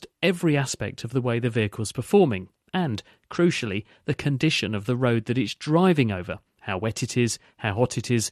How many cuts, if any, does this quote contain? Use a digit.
0